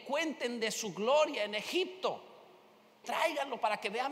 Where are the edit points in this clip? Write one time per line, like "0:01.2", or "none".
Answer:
0:03.0